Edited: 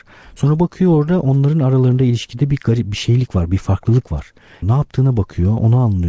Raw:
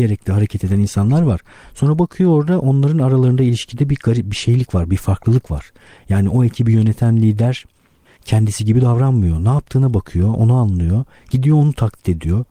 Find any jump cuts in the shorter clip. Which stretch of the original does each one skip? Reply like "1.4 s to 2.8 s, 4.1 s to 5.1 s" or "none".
6.0 s to 9.4 s